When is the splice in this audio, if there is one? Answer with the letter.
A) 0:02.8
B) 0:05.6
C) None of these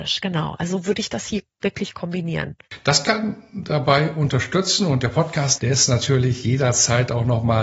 B